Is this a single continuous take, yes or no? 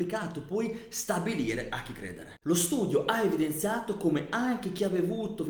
no